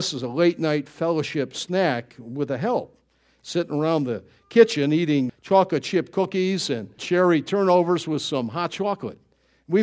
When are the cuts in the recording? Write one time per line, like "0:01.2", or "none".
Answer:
0:05.3
0:07.0